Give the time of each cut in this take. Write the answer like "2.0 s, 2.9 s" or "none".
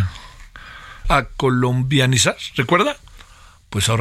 1.0 s